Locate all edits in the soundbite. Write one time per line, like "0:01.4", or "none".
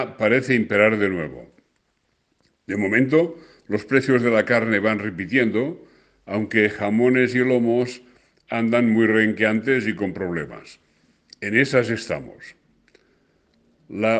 none